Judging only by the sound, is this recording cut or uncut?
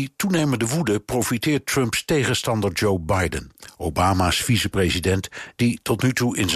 uncut